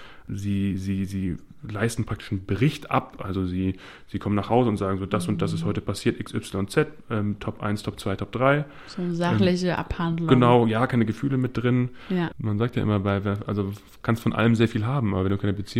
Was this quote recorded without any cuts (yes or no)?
no